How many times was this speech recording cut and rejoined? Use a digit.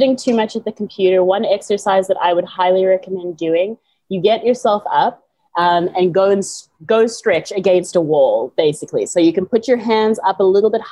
0